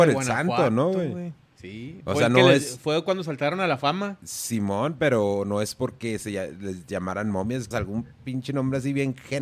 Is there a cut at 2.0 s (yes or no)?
no